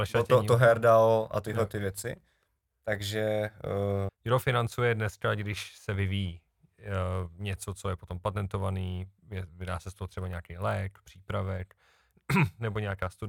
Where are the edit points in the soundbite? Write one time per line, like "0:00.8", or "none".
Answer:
0:04.1